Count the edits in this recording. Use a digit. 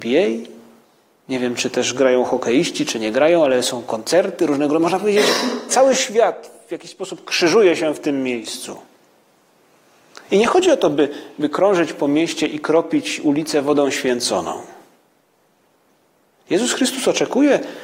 1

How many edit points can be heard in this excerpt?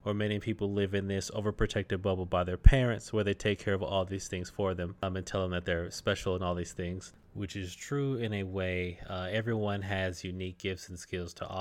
0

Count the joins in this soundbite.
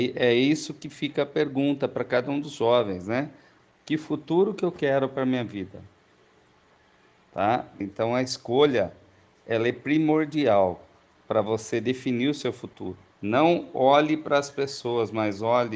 2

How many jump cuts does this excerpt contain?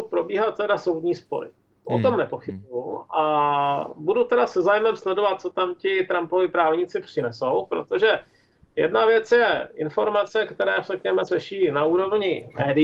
1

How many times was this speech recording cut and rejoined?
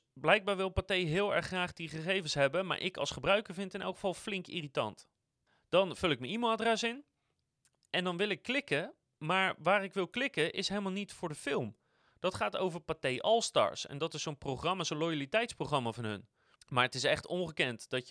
1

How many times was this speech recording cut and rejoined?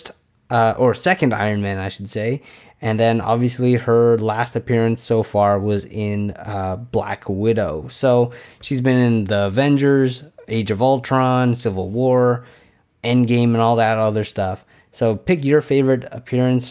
0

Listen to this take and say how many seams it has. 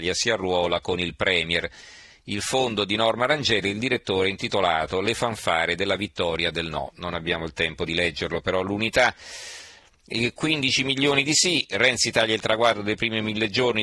0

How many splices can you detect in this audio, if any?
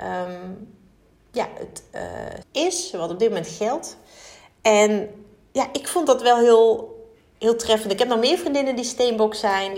1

